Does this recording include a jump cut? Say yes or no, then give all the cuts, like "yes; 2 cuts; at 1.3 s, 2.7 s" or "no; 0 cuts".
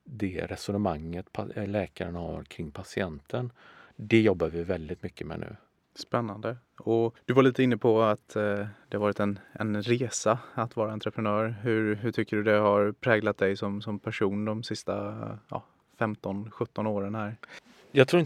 no; 0 cuts